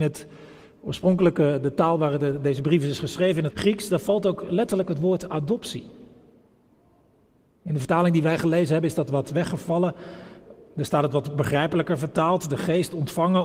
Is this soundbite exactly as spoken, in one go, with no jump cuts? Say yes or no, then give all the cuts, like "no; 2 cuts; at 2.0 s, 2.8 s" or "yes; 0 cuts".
no; 1 cut; at 3.5 s